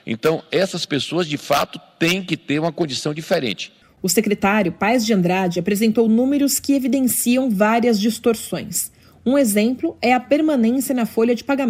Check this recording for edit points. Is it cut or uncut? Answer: uncut